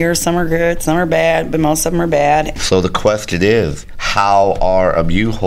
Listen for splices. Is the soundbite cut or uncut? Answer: cut